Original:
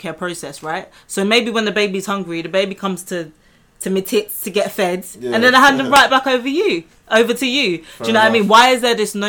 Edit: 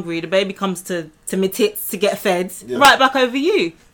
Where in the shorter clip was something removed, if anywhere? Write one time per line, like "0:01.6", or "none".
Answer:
0:01.2
0:02.7